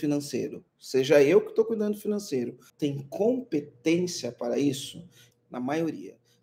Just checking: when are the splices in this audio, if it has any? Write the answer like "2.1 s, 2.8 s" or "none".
2.7 s, 5.3 s

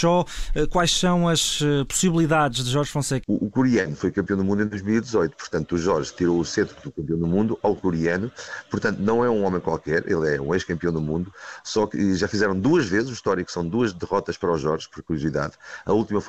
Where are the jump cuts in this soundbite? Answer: 3.2 s

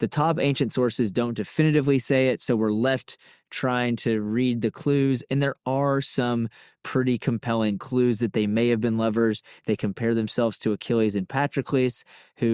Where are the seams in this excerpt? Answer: none

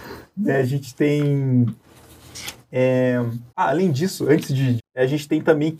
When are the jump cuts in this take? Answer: 3.5 s, 4.8 s

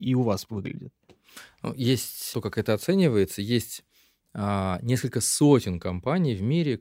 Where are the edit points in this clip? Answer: 2.3 s

